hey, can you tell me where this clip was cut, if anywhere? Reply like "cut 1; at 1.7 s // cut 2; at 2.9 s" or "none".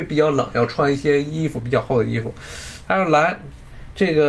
cut 1; at 2.8 s